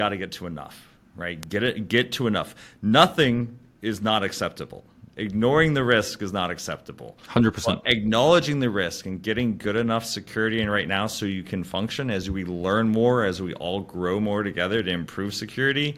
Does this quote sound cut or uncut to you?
uncut